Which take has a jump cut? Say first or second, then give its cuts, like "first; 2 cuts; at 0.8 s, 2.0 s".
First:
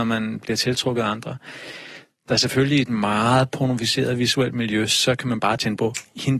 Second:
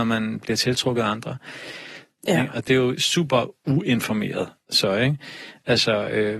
second; 1 cut; at 2.2 s